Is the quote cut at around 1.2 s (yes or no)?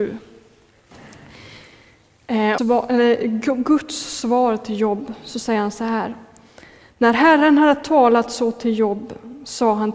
no